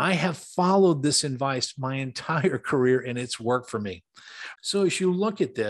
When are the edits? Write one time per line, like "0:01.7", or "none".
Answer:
0:04.6